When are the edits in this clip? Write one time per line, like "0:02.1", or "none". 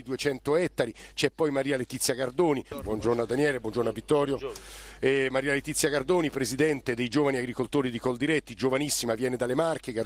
0:02.7

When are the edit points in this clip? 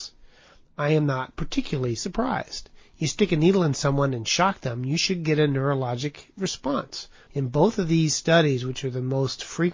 0:07.3

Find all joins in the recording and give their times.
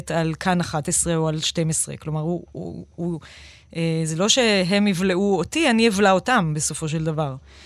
none

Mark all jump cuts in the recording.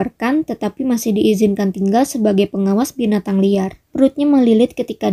0:03.8

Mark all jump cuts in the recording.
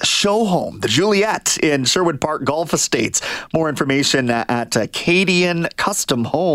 none

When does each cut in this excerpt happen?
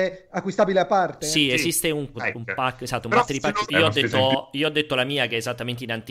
0:02.1
0:03.7

